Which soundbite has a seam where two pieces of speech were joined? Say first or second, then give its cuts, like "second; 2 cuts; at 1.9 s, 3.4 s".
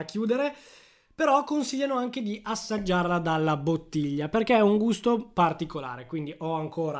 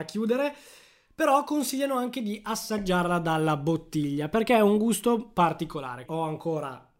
second; 1 cut; at 6.1 s